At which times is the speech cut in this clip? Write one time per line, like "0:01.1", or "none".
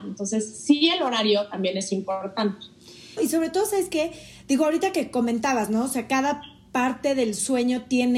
0:03.2